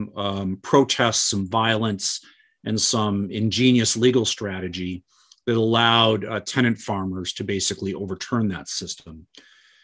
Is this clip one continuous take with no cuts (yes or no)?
yes